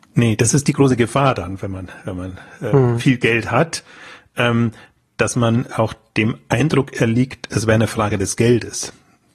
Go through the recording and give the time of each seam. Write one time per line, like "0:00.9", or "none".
none